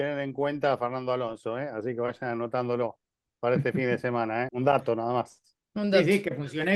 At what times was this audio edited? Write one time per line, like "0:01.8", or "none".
0:04.5